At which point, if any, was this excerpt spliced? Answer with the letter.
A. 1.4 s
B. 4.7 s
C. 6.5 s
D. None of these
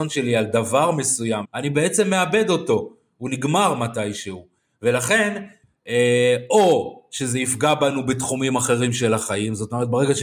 A